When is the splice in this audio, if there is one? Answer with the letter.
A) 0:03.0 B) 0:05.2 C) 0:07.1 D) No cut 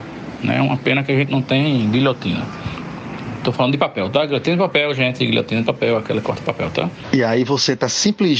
D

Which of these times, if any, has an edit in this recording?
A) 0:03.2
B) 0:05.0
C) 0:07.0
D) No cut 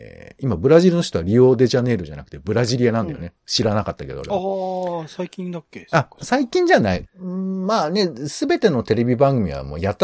C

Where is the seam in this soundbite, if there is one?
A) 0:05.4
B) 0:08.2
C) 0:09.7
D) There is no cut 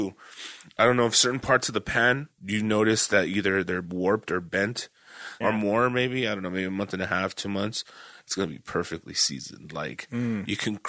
A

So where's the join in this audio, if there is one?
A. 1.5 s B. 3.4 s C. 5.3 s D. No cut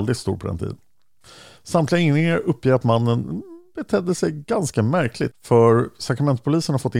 C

